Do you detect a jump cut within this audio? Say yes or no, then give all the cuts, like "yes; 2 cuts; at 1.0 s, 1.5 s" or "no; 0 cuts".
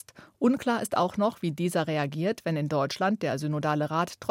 no; 0 cuts